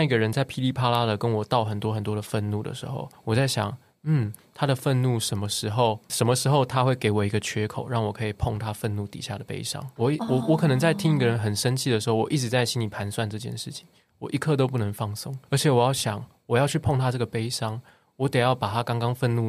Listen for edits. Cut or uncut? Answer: uncut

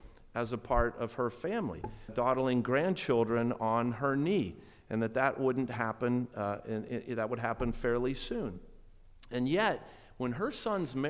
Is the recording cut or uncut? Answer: cut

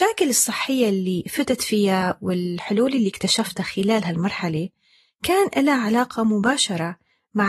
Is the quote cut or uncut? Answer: uncut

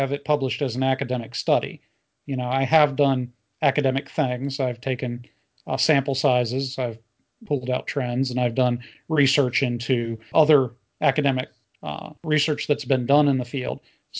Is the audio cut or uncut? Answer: cut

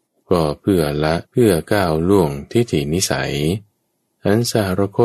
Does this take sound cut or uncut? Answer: cut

